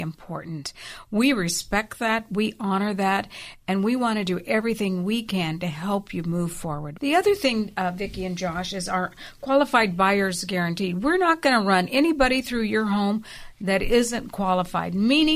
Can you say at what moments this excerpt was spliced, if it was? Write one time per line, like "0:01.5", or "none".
0:07.0